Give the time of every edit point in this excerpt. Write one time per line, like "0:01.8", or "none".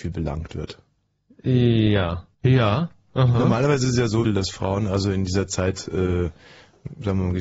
0:02.3
0:04.2